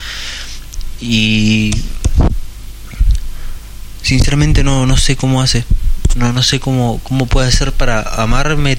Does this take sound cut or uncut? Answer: cut